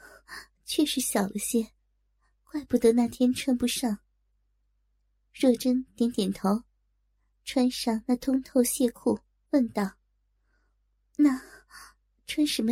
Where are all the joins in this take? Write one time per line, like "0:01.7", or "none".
0:04.3